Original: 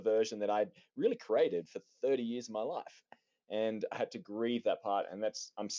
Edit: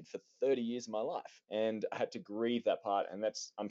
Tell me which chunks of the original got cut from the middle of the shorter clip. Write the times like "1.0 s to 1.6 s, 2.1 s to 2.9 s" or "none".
3.0 s to 3.4 s